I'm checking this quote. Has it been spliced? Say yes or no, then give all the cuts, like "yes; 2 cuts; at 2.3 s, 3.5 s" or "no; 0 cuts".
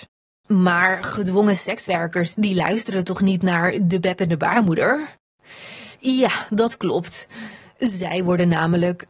yes; 1 cut; at 2.3 s